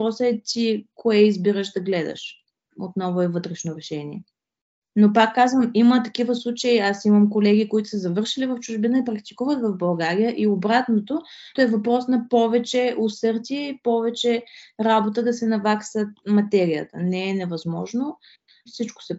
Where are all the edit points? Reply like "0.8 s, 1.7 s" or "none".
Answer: 11.6 s